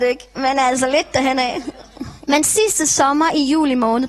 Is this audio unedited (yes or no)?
no